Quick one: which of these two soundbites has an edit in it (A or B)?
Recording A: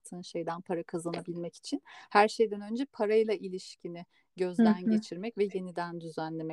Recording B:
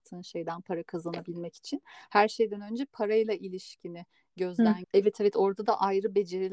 B